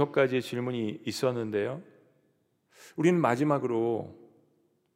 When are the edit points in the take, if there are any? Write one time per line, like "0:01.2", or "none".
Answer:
none